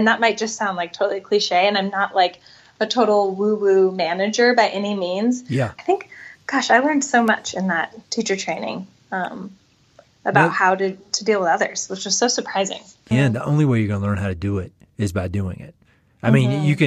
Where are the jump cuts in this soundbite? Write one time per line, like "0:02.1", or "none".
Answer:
0:05.8
0:13.1